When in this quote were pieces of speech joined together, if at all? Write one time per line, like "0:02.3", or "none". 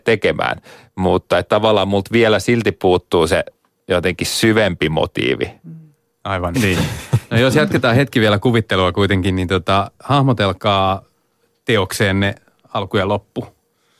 0:06.5